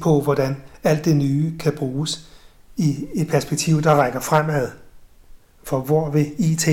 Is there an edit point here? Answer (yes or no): no